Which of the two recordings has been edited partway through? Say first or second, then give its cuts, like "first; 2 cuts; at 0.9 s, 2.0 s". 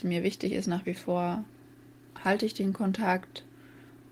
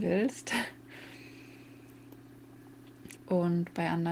second; 1 cut; at 3.2 s